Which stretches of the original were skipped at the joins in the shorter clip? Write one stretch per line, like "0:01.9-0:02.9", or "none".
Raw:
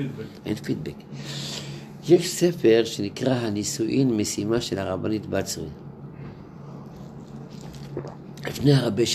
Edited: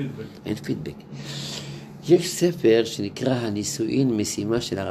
none

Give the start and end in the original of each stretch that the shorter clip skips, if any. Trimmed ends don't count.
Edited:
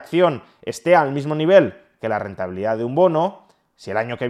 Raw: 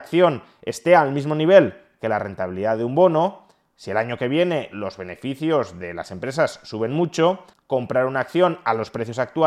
none

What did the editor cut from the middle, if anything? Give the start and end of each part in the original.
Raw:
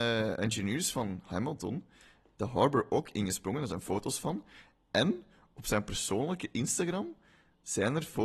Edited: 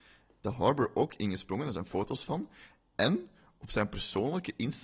none

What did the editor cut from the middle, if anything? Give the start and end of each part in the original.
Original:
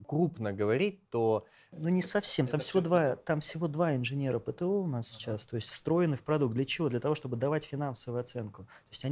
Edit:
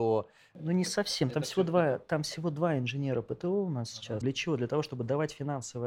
0:05.4-0:06.5

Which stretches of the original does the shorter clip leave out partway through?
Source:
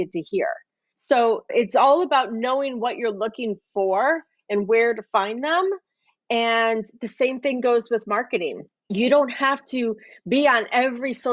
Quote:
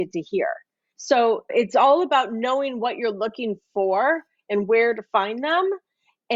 none

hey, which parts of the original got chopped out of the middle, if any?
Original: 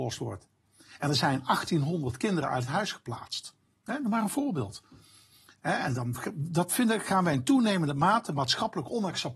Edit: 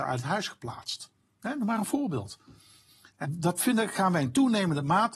0:05.7-0:06.3

